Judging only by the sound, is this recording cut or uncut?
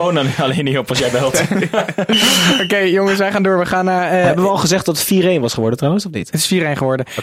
uncut